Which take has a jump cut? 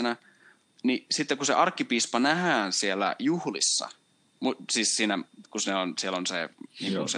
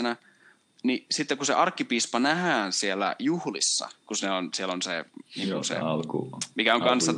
second; 1 cut; at 4.0 s

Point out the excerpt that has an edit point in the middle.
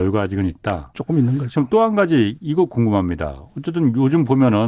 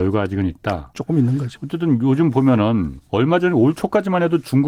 second; 2 cuts; at 1.6 s, 3.1 s

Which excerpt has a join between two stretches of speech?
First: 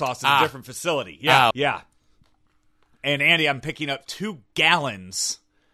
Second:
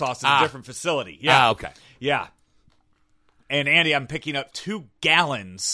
first; 1 cut; at 1.5 s

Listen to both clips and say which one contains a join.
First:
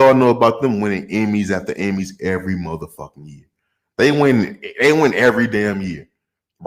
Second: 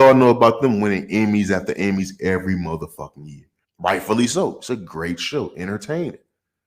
second; 1 cut; at 3.6 s

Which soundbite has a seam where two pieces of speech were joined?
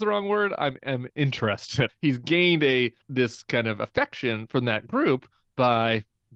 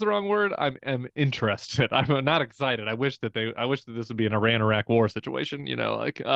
first; 2 cuts; at 1.9 s, 3.0 s

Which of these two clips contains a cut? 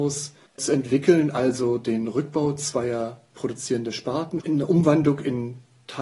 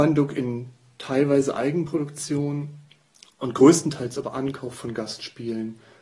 first; 1 cut; at 4.4 s

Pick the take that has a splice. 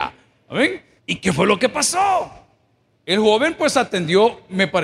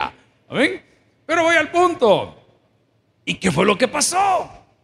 first; 2 cuts; at 1.0 s, 2.9 s

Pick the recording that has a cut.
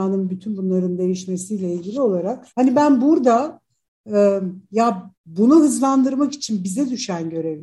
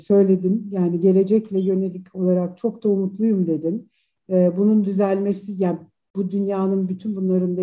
first; 2 cuts; at 2.5 s, 5.2 s

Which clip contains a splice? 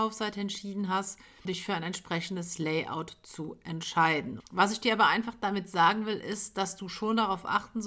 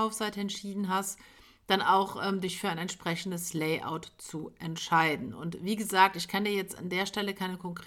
first; 2 cuts; at 1.4 s, 4.4 s

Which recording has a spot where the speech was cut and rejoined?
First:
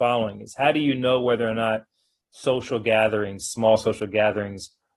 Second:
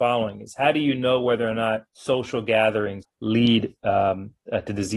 second; 2 cuts; at 1.9 s, 3.0 s

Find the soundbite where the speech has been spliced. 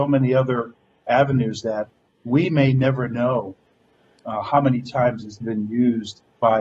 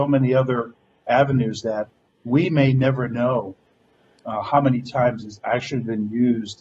first; 1 cut; at 5.4 s

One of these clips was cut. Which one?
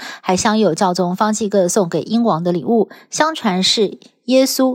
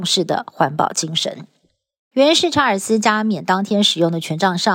second; 1 cut; at 2.1 s

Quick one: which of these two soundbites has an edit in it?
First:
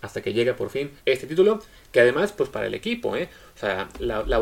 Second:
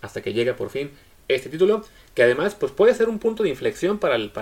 first; 2 cuts; at 1.0 s, 2.5 s

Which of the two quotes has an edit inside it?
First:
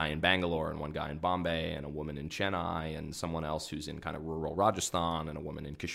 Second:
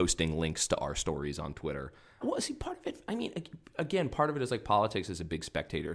second; 1 cut; at 2.2 s

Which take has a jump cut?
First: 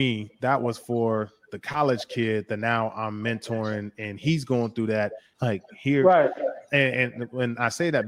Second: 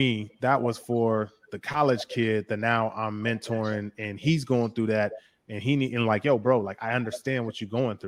first; 1 cut; at 5.3 s

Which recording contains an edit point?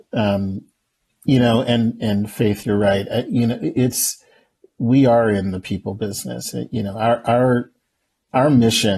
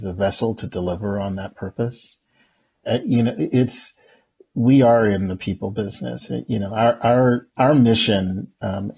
second; 2 cuts; at 2.9 s, 7.5 s

